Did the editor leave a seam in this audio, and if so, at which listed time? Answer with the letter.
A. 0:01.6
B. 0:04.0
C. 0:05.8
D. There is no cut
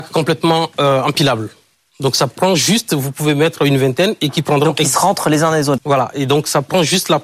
C